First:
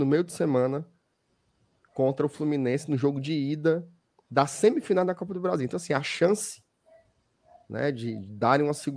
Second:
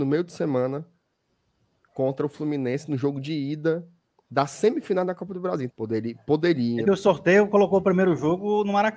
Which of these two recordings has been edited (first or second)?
second